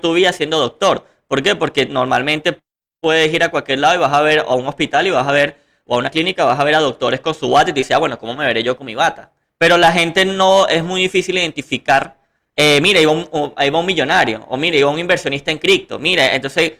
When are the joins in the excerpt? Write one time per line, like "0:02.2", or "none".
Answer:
0:09.5